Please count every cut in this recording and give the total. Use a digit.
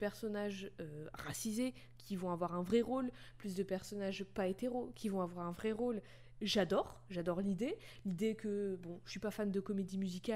0